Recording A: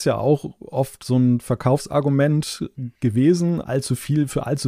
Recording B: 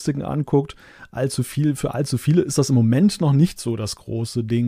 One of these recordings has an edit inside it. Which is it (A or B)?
A